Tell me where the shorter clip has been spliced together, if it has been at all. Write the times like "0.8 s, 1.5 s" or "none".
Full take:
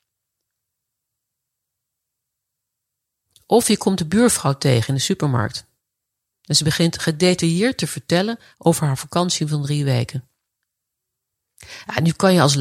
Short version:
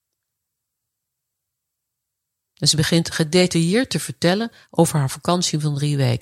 2.5 s